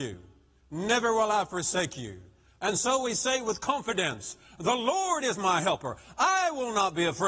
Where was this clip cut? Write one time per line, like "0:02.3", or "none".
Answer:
none